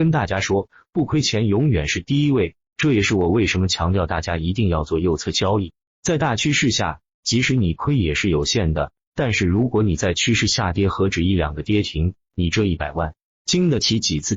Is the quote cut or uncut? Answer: uncut